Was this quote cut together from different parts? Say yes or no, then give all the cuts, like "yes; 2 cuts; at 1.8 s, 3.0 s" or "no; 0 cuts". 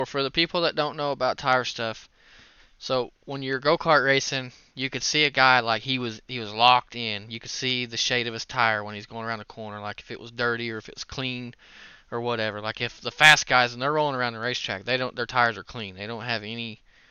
no; 0 cuts